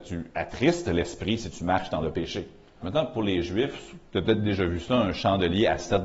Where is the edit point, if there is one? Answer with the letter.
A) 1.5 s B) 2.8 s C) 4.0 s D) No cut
B